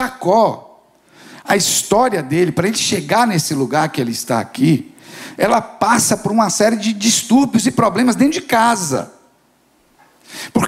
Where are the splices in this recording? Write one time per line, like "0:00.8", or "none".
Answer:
none